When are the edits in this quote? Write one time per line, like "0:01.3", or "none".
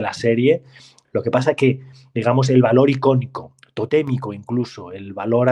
none